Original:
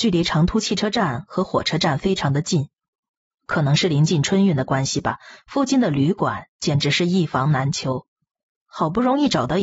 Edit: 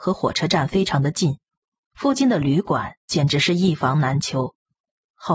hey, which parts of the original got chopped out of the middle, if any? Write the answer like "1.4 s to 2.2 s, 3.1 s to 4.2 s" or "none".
3.2 s to 5.4 s